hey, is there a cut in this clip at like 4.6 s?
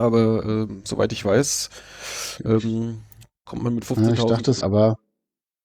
yes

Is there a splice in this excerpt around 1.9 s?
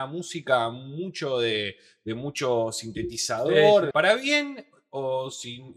no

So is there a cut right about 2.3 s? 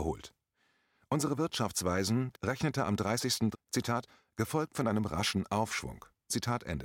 yes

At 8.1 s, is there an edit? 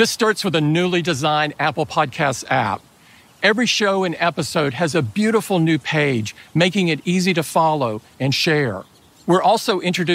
yes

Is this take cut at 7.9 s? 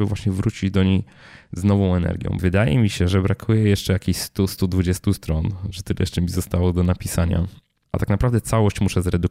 no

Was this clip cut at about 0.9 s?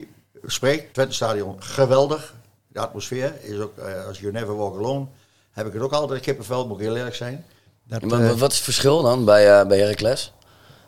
yes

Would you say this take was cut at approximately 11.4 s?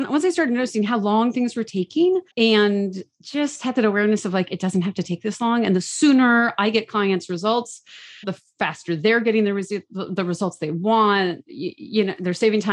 no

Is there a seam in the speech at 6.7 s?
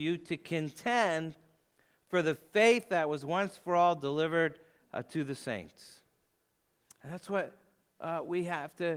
no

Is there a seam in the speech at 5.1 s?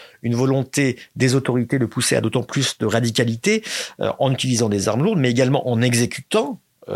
no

